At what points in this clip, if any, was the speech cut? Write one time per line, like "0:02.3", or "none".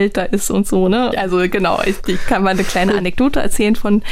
0:01.1